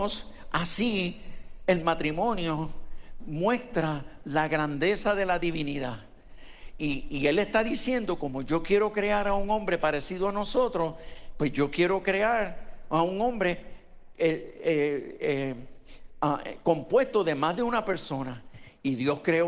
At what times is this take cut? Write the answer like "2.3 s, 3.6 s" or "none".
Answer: none